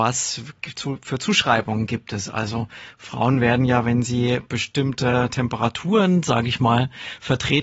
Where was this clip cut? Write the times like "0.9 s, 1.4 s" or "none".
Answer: none